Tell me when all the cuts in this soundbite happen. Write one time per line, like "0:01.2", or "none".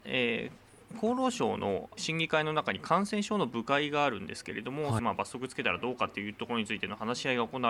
0:02.0
0:05.0